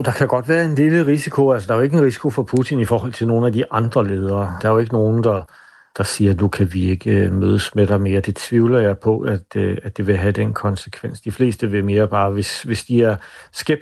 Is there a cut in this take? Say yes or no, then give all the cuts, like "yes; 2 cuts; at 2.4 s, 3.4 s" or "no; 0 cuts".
no; 0 cuts